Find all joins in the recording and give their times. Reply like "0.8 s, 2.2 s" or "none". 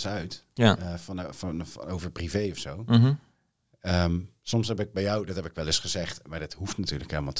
none